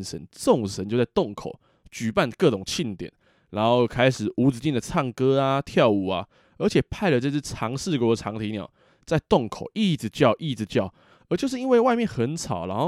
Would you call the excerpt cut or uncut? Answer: uncut